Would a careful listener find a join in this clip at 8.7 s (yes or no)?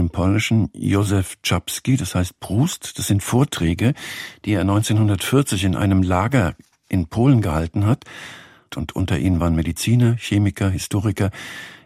yes